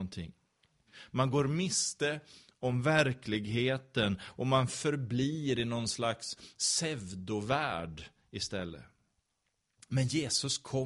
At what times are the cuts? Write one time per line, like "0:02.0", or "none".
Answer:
none